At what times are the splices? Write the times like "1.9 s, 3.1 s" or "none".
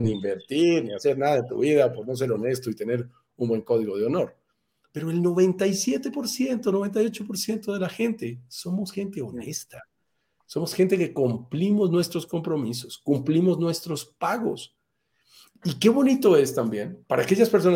none